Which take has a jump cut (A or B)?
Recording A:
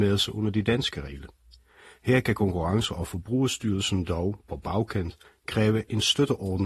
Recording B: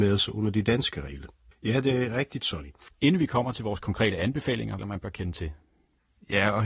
B